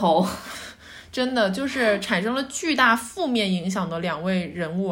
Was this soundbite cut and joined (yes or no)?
no